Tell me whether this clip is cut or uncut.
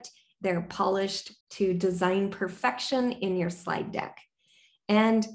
cut